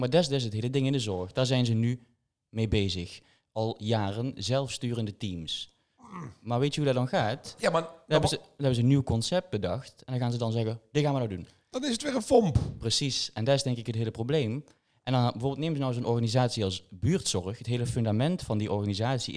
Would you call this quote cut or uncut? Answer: uncut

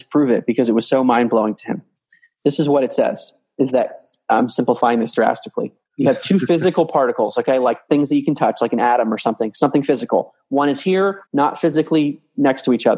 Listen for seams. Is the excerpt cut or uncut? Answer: cut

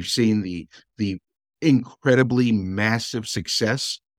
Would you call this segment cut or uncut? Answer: uncut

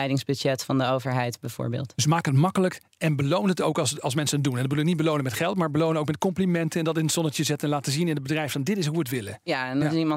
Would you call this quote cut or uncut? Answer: uncut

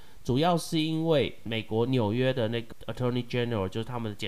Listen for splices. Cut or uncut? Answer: uncut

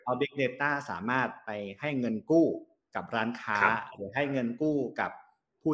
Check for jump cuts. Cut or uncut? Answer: uncut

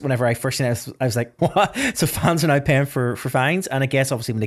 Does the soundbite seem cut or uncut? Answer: cut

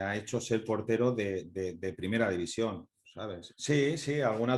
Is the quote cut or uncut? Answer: cut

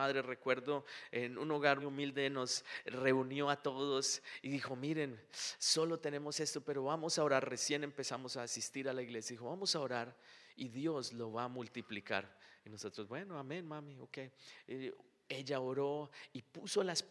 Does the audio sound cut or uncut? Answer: cut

